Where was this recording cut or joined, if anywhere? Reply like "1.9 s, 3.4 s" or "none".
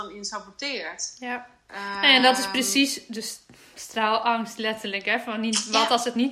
none